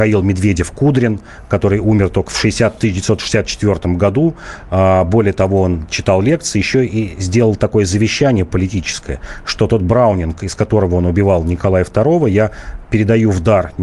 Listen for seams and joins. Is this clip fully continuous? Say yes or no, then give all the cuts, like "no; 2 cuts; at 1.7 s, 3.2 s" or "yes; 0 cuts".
yes; 0 cuts